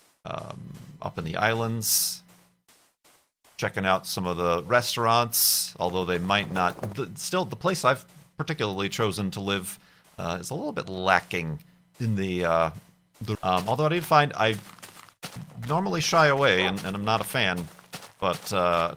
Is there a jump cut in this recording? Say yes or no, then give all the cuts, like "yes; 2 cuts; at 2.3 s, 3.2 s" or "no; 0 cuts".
yes; 1 cut; at 13.3 s